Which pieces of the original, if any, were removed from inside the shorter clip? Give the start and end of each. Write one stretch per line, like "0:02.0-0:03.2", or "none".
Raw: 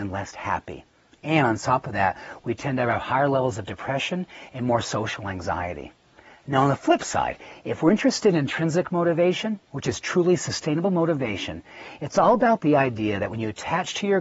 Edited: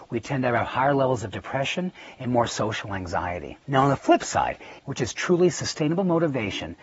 0:06.0-0:06.4
0:07.6-0:09.6

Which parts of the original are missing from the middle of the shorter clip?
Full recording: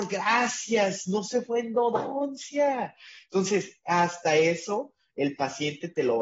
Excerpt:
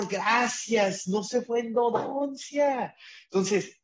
none

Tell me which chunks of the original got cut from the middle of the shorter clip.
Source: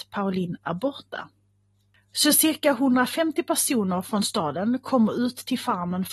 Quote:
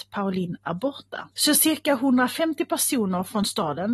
0:01.3-0:02.1

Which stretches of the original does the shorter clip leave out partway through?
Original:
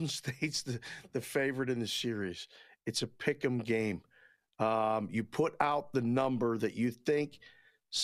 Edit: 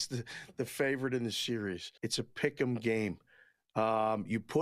0:02.5-0:02.8

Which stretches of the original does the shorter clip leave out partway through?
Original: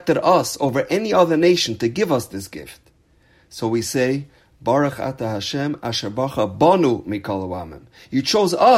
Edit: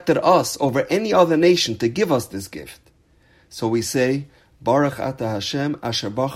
none

